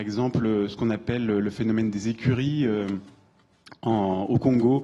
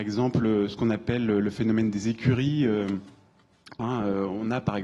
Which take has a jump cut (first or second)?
second